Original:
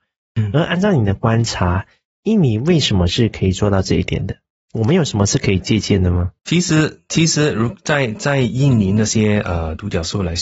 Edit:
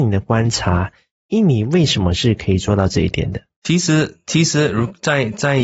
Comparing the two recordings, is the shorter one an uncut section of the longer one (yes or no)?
no